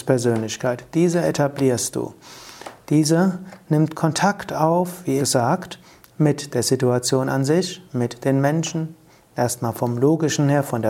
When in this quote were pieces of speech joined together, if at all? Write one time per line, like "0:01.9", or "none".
0:05.2